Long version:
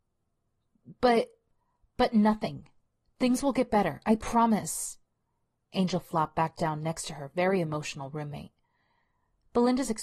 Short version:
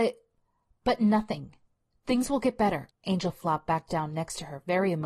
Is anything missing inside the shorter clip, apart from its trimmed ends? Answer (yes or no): yes